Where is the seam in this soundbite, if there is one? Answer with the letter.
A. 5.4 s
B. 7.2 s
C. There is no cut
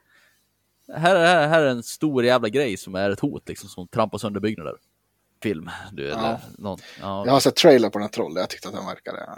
A